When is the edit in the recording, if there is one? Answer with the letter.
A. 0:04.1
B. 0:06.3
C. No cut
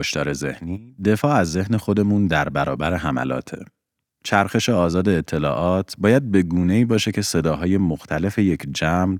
A